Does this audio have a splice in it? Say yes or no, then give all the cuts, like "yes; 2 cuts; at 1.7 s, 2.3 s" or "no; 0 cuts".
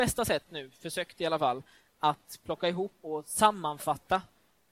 yes; 1 cut; at 3.0 s